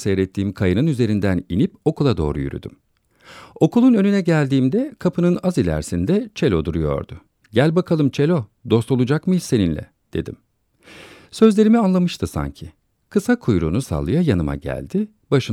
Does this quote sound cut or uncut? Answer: cut